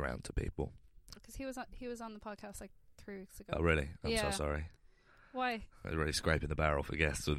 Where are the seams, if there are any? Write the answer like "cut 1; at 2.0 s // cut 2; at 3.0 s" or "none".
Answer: cut 1; at 1.2 s